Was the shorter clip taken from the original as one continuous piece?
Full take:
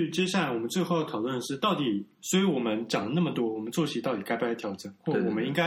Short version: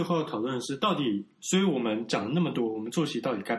yes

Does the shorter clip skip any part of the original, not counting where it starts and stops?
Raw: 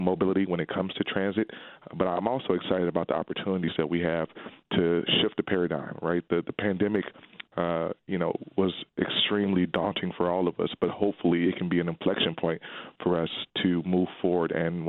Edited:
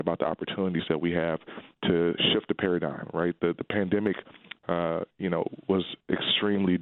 no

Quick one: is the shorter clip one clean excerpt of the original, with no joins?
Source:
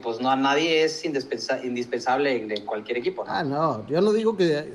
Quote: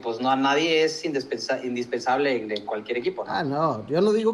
yes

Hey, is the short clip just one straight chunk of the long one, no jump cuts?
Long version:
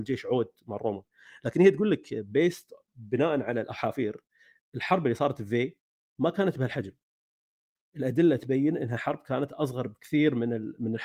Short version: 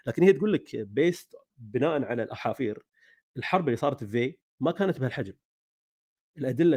no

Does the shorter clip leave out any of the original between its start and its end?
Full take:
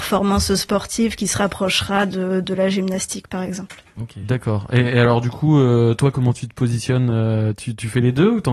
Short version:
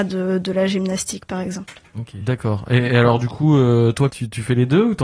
yes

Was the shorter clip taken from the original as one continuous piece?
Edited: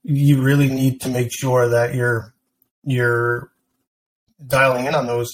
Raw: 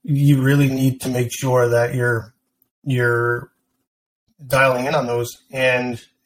yes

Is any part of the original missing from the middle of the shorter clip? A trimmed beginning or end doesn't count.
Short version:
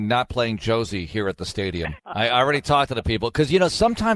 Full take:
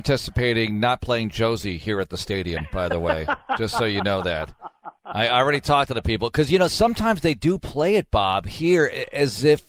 yes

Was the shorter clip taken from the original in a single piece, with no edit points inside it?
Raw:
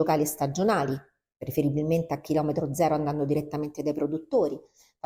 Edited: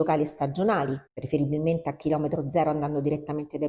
no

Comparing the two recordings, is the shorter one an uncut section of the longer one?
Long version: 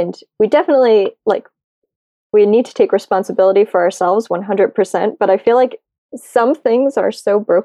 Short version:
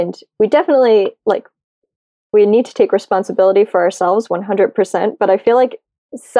yes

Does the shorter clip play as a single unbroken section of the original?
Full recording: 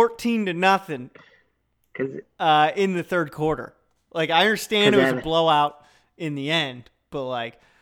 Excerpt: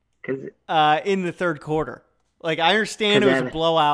yes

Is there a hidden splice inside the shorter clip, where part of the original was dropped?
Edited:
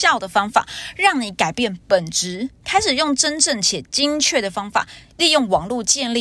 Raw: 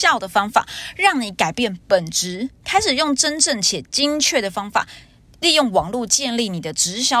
yes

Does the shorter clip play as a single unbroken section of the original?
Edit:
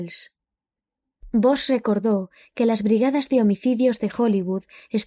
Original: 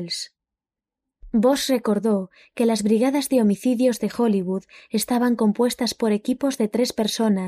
yes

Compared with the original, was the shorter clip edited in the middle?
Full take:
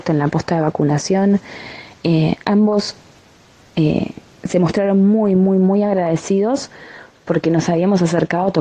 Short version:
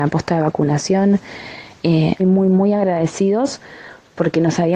yes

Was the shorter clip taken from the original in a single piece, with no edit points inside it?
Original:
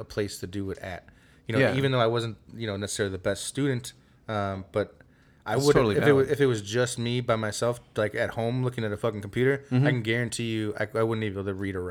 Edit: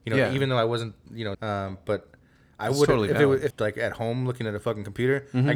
no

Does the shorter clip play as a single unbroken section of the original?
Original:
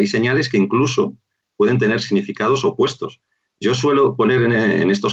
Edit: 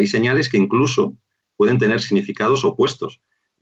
yes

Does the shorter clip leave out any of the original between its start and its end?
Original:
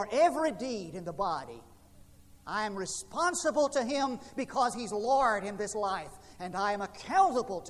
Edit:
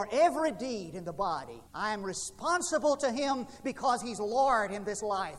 yes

